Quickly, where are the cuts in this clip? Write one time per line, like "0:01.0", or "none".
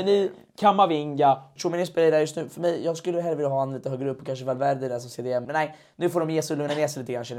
0:01.6
0:05.4